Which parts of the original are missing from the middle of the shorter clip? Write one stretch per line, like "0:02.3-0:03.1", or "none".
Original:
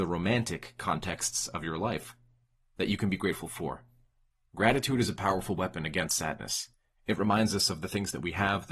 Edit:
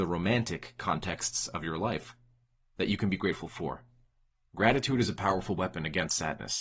none